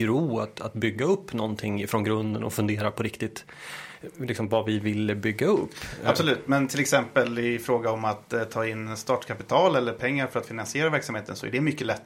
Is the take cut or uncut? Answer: uncut